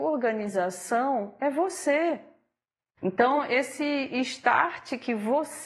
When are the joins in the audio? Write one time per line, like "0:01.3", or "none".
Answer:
0:03.0